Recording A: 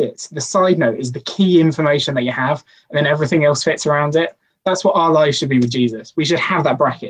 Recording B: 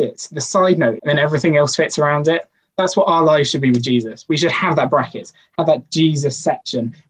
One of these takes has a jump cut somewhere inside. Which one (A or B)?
B